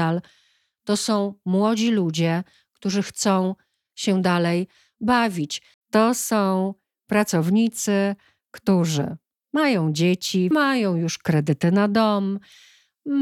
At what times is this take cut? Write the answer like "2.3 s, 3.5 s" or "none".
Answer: 5.7 s, 10.5 s